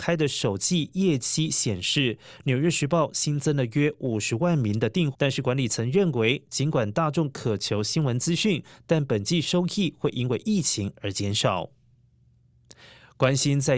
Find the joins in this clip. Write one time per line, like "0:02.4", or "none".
0:05.1